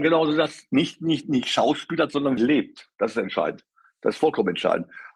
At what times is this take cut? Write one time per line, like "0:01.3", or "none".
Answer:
0:02.4